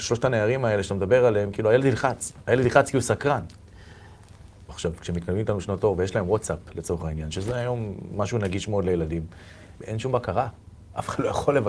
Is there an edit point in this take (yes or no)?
yes